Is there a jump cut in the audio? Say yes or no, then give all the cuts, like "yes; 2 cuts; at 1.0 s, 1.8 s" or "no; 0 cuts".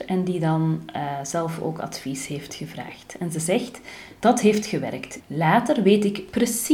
yes; 1 cut; at 5.2 s